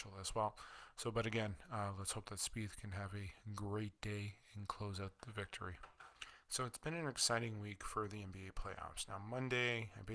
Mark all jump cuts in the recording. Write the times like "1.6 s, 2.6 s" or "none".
none